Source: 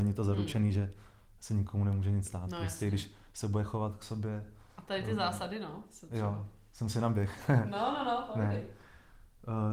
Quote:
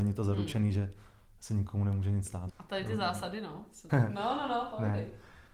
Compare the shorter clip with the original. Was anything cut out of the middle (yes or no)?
yes